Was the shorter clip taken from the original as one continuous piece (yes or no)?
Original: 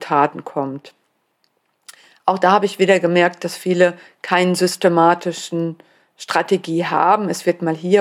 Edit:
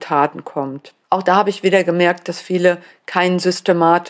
no